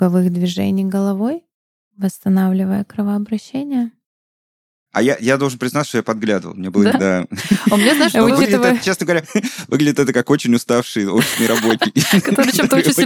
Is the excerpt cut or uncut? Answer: cut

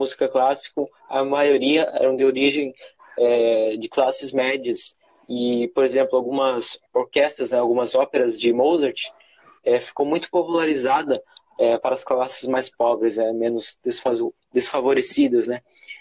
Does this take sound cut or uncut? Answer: uncut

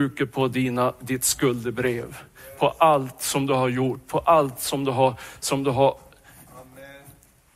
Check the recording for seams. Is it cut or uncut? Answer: uncut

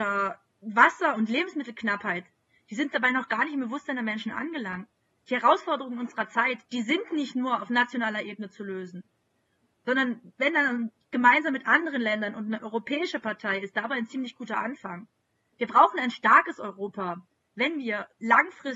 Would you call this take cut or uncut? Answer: cut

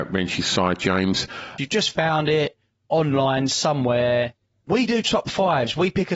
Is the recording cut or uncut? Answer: cut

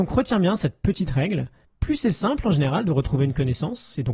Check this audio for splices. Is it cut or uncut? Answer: uncut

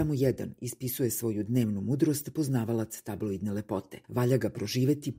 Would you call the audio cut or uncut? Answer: cut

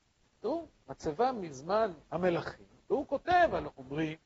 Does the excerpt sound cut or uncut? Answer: cut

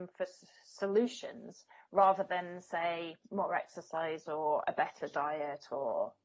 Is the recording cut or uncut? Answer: cut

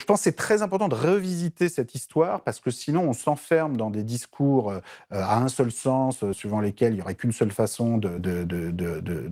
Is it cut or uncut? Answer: cut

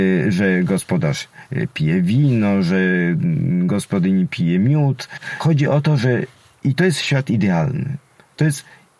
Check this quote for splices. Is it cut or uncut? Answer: uncut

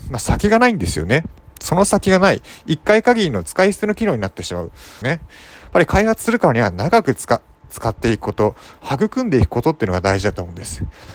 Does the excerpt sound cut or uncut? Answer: cut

